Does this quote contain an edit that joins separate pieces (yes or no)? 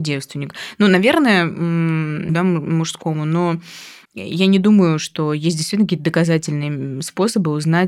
yes